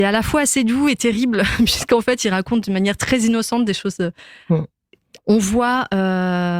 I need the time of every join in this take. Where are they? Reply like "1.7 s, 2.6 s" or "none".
5.2 s

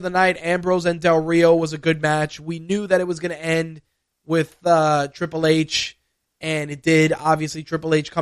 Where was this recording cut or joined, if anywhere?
none

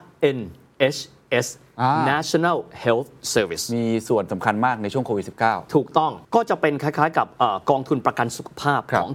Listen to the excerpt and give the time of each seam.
6.2 s

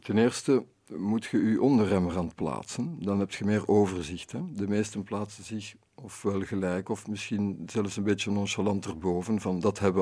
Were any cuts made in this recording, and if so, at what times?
none

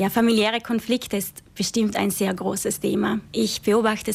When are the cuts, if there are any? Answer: none

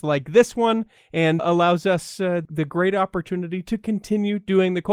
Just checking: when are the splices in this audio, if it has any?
1.4 s, 2.4 s

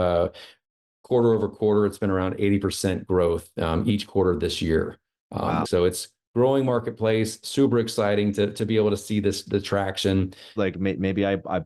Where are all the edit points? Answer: 5.6 s, 10.6 s

